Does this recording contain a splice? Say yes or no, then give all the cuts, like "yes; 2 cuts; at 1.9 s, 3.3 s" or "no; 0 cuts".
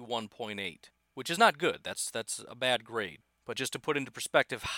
no; 0 cuts